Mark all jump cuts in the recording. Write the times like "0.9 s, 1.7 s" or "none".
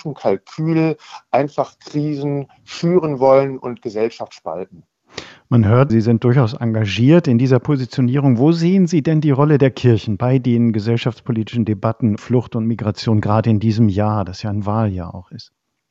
5.9 s, 12.2 s